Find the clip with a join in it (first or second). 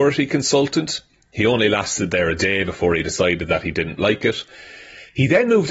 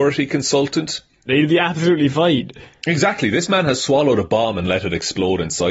second